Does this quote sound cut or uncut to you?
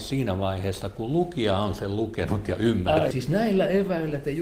cut